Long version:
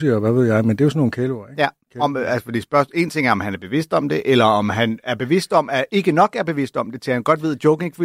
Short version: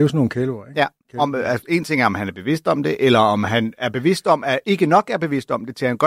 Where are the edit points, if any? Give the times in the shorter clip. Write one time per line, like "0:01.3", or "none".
0:01.6

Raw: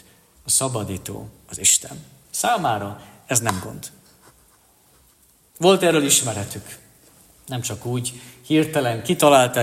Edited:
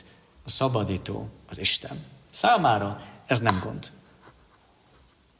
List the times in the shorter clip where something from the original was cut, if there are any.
none

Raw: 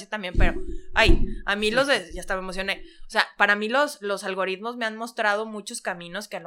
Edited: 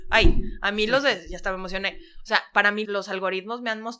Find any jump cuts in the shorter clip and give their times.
0:02.8

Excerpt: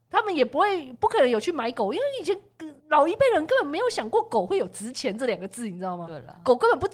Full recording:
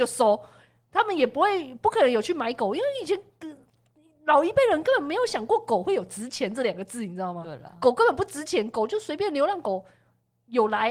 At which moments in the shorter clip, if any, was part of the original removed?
0:02.8

